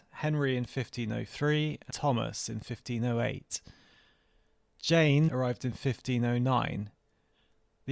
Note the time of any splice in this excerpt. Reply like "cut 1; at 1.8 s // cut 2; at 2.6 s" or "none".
cut 1; at 1.9 s // cut 2; at 5.3 s